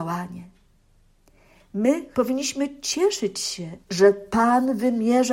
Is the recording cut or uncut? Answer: cut